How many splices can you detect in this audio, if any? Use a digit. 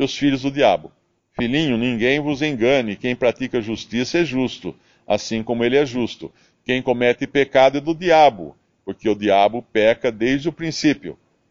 1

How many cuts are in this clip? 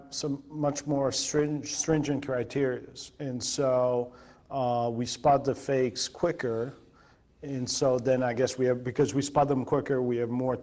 0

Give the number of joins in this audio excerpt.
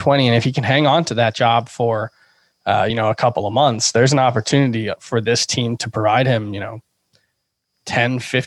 0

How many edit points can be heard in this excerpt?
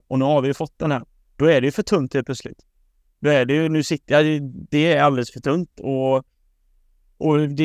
0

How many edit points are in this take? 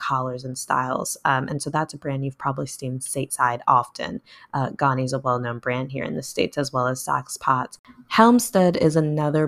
0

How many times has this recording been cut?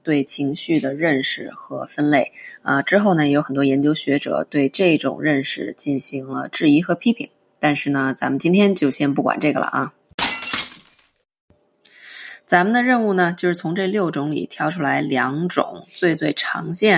0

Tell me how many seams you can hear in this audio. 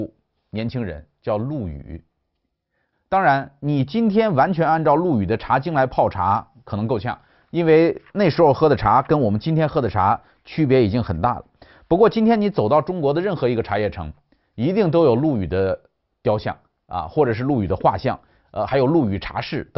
1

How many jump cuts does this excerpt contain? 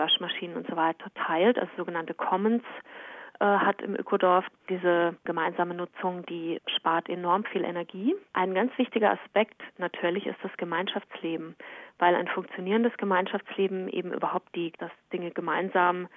2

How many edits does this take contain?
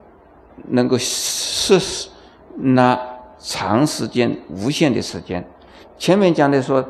0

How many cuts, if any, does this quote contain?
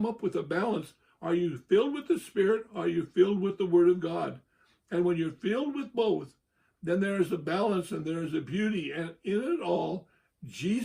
0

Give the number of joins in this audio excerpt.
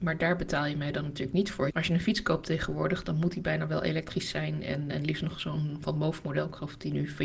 1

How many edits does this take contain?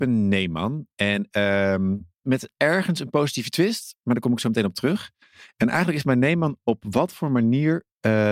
1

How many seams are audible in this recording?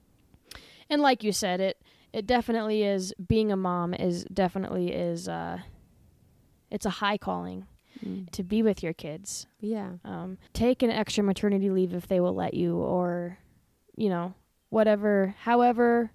2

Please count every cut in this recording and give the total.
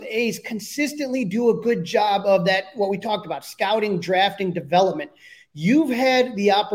0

